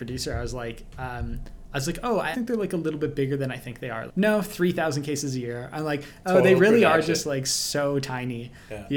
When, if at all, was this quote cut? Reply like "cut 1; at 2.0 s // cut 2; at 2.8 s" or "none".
cut 1; at 2.3 s // cut 2; at 4.1 s

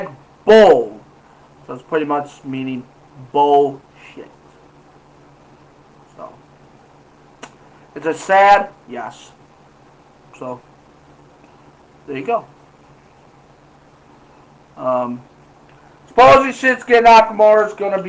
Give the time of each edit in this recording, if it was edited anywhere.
cut 1; at 10.3 s

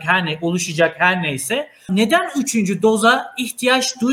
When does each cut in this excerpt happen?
cut 1; at 1.9 s

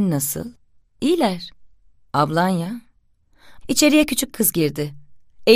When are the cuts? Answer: cut 1; at 3.6 s

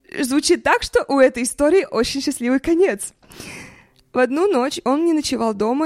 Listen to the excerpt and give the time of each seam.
none

